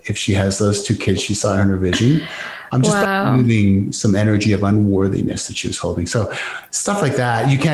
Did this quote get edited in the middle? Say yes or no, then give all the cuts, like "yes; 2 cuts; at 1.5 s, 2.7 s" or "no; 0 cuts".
no; 0 cuts